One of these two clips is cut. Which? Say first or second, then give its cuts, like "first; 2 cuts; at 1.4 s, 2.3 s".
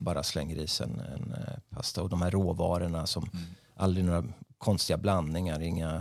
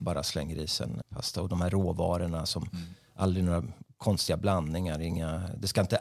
second; 1 cut; at 1.0 s